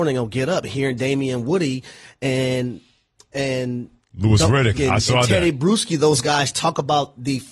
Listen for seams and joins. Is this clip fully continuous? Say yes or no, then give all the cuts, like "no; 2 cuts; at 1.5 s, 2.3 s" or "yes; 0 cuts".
no; 1 cut; at 4.8 s